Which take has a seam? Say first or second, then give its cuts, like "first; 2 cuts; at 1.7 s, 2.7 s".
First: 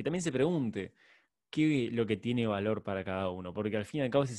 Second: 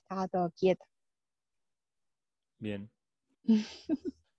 second; 1 cut; at 3.3 s